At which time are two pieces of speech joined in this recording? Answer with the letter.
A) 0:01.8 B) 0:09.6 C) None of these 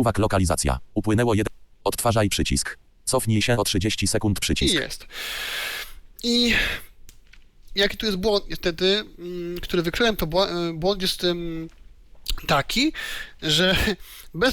C